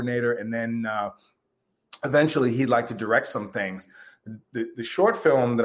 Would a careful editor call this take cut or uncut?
uncut